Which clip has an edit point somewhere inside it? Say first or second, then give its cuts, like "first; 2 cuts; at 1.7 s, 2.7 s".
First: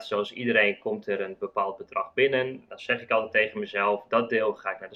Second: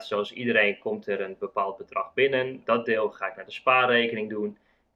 second; 1 cut; at 2.6 s